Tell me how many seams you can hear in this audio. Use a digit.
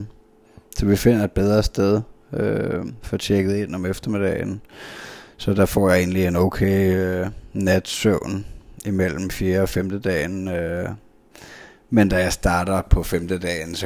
0